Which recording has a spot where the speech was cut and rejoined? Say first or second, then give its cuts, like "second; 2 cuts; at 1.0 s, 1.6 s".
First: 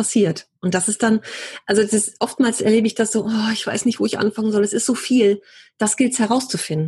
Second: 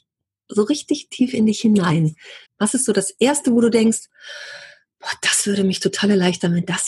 second; 1 cut; at 2.5 s